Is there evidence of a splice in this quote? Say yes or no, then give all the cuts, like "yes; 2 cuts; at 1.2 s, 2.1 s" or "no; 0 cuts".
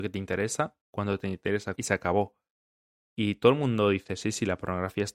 yes; 1 cut; at 1.8 s